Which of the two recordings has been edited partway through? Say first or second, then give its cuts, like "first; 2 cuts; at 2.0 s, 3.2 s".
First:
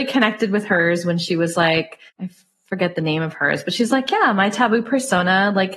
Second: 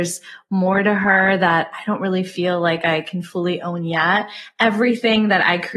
first; 1 cut; at 2.1 s